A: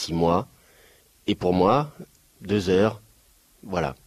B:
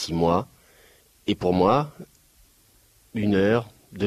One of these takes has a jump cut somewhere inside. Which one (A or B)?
A